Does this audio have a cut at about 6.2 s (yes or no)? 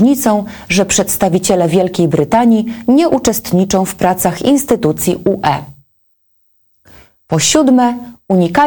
no